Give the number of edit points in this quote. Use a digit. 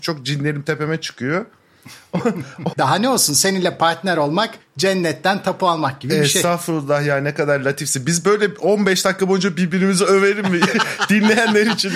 1